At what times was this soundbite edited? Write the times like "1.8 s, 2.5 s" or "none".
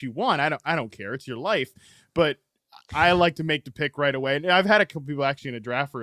none